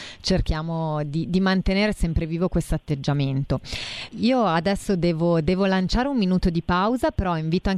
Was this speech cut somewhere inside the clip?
yes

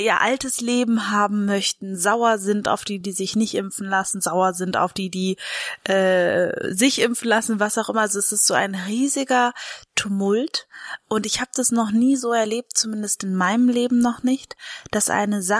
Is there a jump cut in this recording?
no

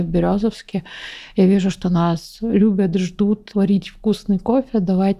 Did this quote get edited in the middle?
yes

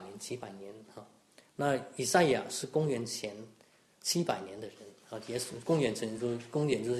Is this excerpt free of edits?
yes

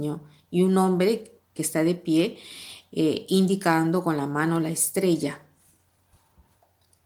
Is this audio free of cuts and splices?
no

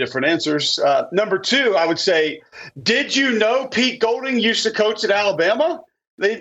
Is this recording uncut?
yes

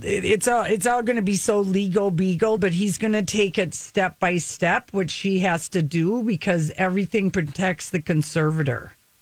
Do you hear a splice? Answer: no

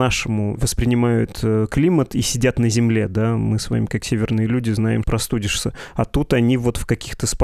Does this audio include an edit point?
yes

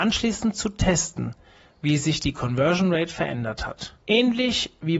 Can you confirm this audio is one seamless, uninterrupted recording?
no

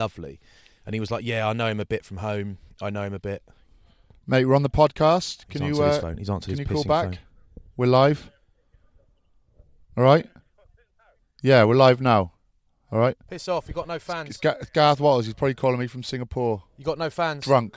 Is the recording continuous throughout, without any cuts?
yes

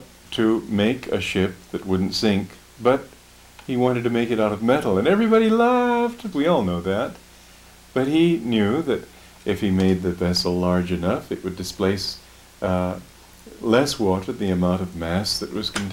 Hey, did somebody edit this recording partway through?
yes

